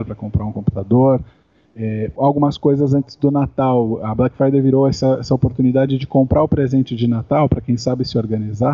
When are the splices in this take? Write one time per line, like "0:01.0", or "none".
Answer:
0:02.2